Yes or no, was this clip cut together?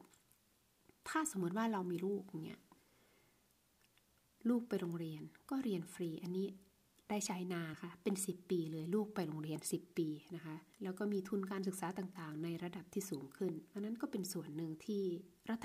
yes